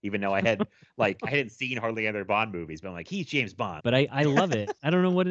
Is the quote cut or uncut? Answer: cut